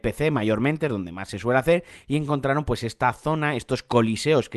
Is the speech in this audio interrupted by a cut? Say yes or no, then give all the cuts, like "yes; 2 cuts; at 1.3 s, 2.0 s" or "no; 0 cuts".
no; 0 cuts